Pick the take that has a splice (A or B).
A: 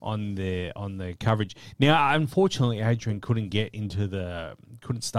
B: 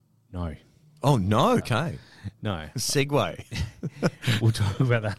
B